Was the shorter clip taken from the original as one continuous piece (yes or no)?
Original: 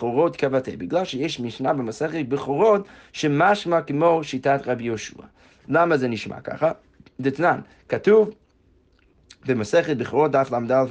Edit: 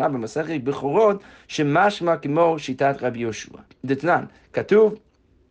no